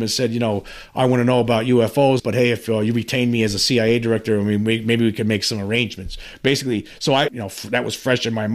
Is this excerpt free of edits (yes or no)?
no